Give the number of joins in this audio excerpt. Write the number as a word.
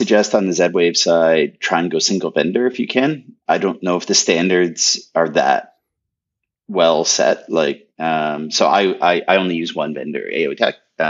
zero